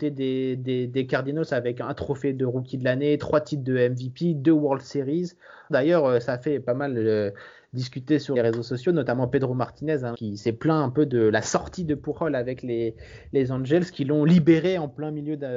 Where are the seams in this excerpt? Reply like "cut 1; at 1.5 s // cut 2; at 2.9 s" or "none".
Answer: cut 1; at 5.7 s // cut 2; at 8.3 s // cut 3; at 10.1 s

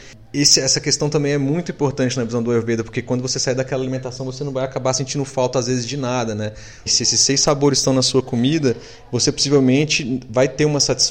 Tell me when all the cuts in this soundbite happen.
cut 1; at 6.9 s

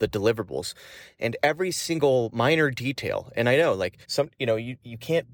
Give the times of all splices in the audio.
cut 1; at 4.0 s

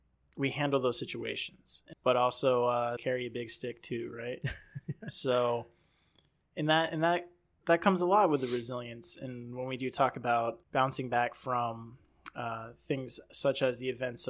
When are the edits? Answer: cut 1; at 1.9 s // cut 2; at 3.0 s // cut 3; at 10.6 s

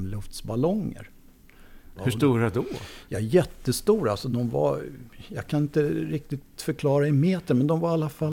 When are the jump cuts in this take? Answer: cut 1; at 1.9 s

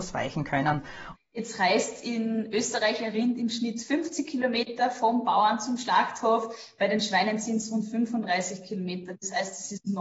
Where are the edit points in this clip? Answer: cut 1; at 1.1 s

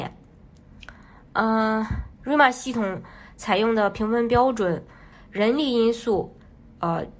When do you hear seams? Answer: cut 1; at 5.1 s

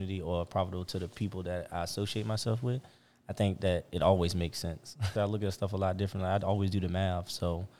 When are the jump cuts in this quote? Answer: cut 1; at 5.2 s

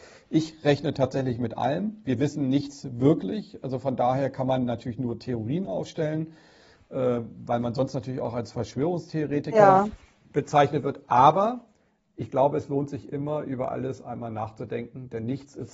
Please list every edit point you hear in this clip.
none

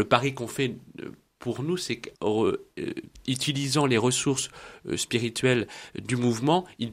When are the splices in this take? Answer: cut 1; at 2.1 s

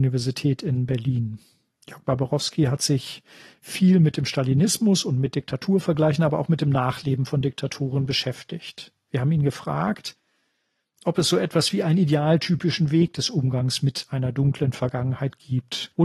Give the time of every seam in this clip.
none

